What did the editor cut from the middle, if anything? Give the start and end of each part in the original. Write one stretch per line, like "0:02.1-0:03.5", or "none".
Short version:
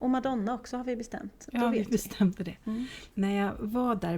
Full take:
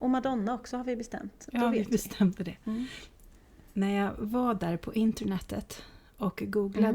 0:03.1-0:03.7